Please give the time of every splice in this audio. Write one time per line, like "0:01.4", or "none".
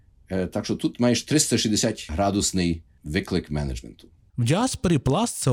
0:04.3